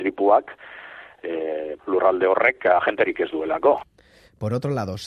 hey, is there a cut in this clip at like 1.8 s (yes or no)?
yes